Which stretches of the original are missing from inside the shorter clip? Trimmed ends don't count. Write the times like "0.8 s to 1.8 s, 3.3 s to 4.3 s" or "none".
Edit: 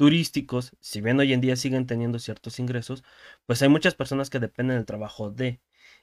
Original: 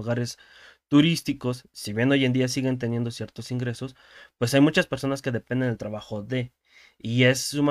none